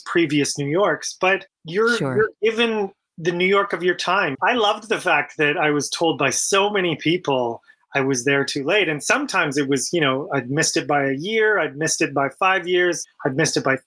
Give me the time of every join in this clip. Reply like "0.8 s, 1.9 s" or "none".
4.3 s